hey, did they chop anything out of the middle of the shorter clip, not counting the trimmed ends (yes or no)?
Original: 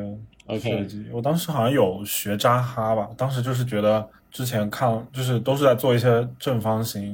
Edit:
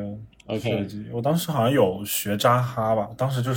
no